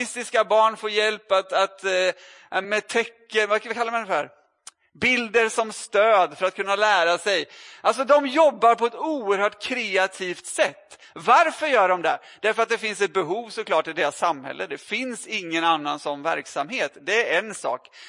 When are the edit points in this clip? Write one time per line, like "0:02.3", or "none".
0:02.6